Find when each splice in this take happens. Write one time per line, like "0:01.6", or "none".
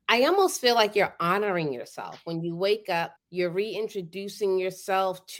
0:03.2